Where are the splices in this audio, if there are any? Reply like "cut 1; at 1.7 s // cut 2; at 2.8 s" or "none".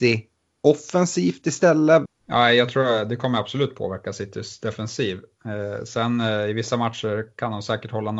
cut 1; at 2.0 s